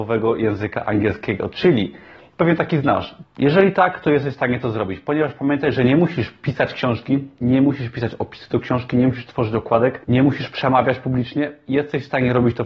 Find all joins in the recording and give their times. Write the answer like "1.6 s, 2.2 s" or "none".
3.2 s, 10.0 s